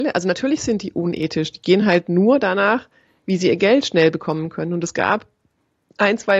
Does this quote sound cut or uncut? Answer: uncut